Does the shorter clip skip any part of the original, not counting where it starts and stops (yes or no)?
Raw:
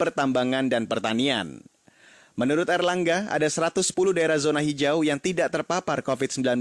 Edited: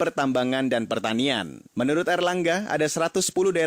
yes